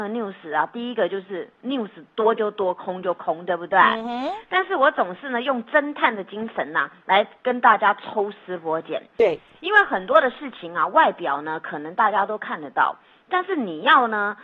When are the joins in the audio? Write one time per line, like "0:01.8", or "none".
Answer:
none